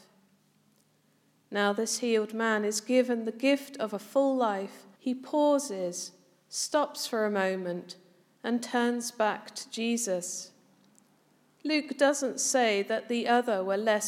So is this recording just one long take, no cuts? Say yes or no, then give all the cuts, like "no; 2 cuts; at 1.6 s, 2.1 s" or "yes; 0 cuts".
no; 1 cut; at 5.0 s